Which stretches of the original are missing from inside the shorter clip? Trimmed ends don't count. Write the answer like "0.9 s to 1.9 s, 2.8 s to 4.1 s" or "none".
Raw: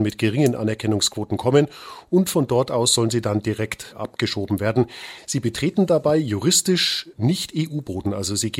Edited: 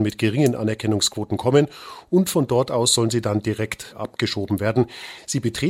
none